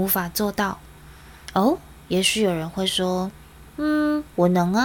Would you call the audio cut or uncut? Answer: cut